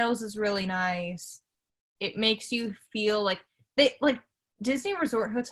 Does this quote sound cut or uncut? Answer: uncut